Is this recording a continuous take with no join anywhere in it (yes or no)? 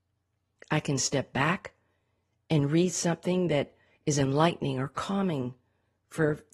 yes